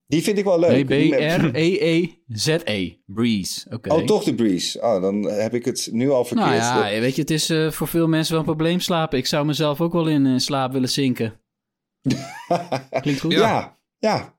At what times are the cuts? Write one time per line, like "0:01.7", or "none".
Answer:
none